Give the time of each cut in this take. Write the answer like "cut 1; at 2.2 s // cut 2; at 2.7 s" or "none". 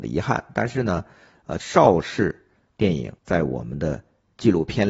cut 1; at 1.6 s // cut 2; at 3.2 s